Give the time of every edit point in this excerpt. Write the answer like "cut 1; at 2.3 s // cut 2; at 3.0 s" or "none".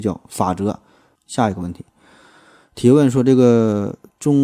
cut 1; at 1.2 s